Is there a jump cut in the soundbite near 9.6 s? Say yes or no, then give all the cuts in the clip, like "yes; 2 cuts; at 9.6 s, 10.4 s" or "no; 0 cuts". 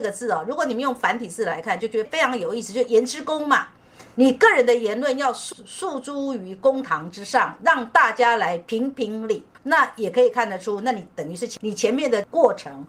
yes; 1 cut; at 9.6 s